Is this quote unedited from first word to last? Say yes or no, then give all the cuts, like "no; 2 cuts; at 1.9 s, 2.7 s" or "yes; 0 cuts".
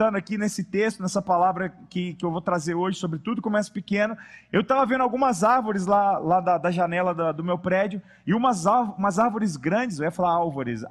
yes; 0 cuts